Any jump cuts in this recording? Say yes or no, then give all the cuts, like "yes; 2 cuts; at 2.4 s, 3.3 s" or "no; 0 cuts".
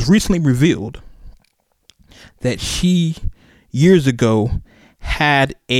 no; 0 cuts